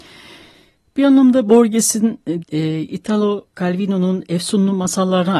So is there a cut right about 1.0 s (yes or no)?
no